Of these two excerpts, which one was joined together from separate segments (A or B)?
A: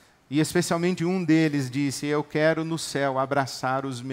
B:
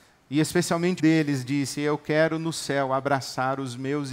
B